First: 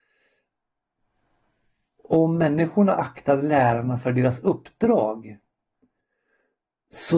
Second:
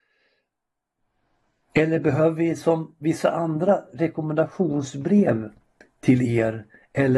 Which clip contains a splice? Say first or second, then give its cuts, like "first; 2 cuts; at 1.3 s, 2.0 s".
second; 1 cut; at 1.6 s